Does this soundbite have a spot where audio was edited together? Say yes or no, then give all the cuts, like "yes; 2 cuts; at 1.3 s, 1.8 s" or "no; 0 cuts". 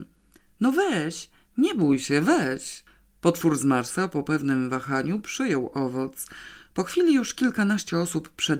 no; 0 cuts